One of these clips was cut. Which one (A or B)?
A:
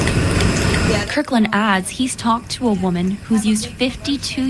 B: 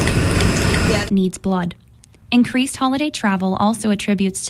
B